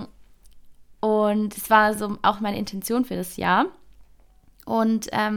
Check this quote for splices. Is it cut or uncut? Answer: uncut